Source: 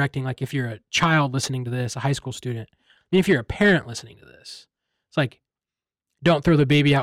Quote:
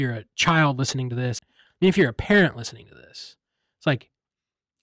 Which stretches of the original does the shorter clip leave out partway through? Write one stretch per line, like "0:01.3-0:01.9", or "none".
0:01.9-0:02.7